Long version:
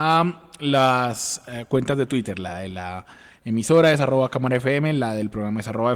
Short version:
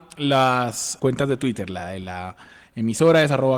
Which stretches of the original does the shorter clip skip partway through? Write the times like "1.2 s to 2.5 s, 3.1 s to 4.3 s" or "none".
1.4 s to 1.7 s